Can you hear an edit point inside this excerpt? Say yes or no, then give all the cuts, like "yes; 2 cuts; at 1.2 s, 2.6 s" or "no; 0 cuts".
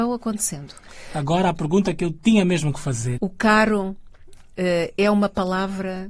yes; 1 cut; at 3.2 s